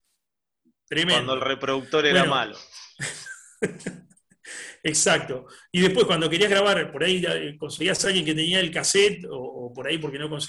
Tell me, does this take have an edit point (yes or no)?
no